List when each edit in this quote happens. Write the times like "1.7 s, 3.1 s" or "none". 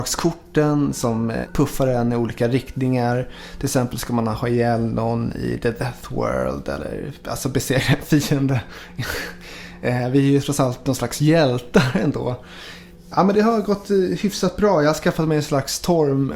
none